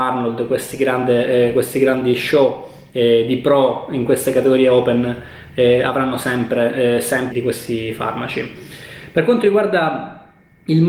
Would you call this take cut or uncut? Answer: cut